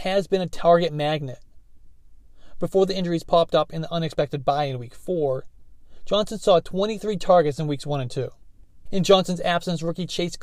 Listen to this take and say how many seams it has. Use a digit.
1